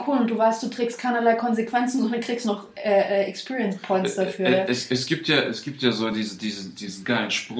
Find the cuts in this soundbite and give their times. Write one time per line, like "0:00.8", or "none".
none